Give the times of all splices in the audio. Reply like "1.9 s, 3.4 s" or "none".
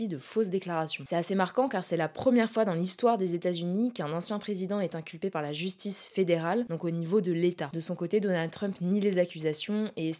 none